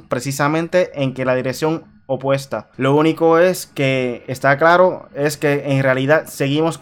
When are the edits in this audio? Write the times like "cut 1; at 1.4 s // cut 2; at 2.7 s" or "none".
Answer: cut 1; at 2.7 s